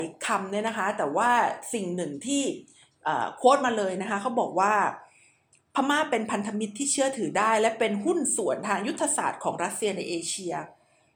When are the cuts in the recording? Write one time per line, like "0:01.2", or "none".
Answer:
none